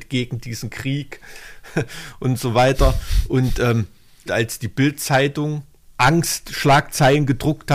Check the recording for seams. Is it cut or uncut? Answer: cut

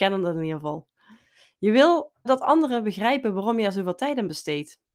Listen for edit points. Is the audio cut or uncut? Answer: cut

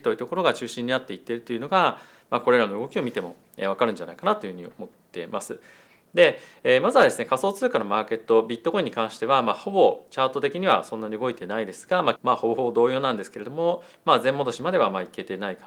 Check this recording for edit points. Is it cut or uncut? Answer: cut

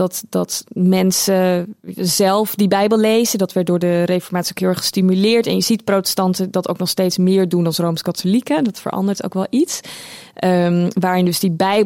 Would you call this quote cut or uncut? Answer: uncut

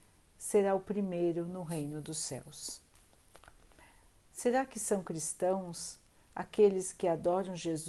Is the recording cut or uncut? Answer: cut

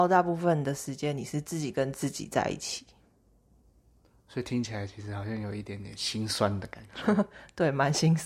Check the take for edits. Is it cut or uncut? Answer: uncut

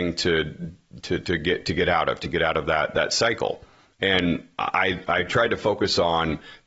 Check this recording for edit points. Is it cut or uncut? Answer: uncut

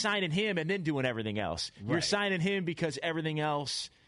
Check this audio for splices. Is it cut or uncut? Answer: uncut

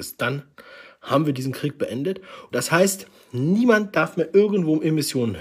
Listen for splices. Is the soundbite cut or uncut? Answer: cut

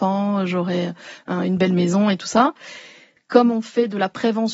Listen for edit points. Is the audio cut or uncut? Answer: cut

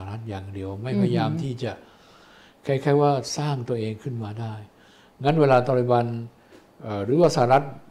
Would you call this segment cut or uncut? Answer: uncut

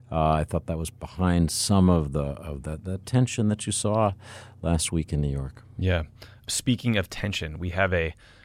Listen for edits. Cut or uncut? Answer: uncut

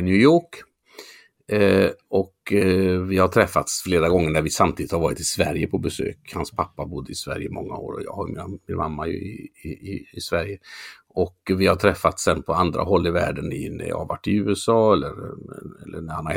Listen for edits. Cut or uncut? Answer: uncut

